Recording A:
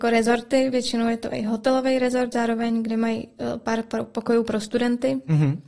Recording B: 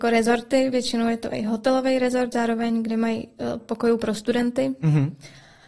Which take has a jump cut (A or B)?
B